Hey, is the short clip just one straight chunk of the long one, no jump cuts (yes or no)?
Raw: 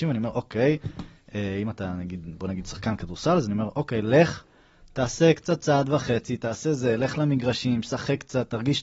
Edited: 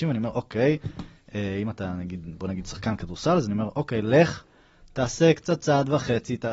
yes